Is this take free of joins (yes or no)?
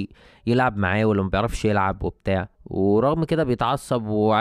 no